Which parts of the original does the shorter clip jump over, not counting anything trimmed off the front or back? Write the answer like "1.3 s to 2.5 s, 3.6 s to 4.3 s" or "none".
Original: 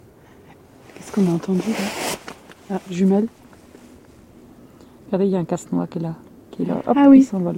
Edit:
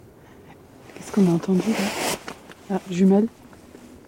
none